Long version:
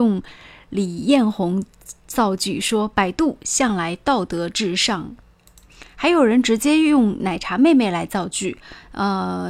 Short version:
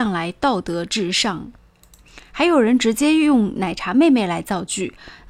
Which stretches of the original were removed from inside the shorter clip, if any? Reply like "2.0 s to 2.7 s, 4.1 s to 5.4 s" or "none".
none